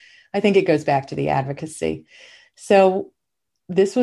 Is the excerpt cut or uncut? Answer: uncut